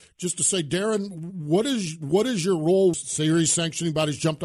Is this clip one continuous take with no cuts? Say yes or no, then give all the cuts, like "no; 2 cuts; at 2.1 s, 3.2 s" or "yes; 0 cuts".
no; 1 cut; at 2.9 s